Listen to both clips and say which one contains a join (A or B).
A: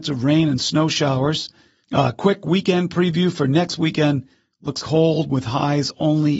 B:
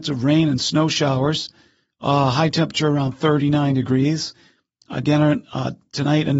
A